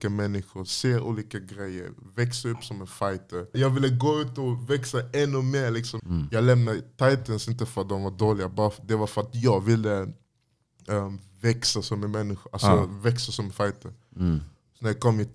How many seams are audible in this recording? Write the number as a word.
two